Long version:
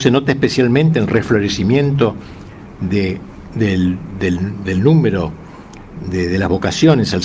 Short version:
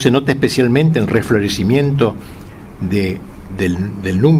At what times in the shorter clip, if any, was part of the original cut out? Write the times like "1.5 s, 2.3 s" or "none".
3.5 s